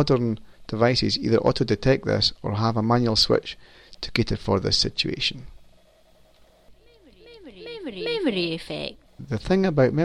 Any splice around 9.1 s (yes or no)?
yes